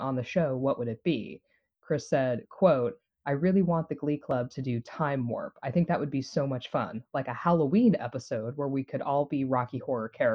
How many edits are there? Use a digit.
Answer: 0